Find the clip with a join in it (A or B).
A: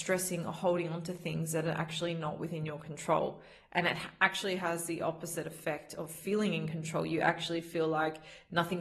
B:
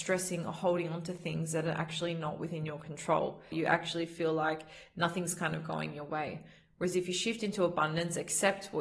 B